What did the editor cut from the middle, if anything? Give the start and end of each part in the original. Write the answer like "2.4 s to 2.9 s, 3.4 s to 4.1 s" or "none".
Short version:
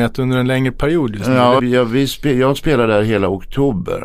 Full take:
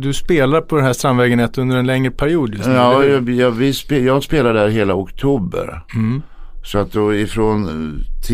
3.0 s to 3.3 s